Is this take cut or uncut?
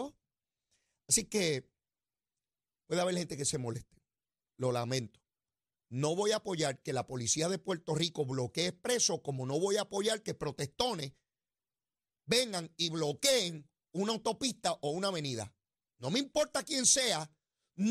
uncut